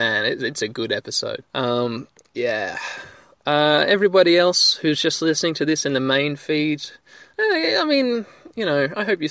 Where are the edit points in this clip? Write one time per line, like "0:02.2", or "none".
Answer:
0:01.4